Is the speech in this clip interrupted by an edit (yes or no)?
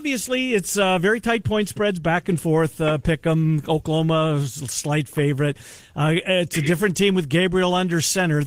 no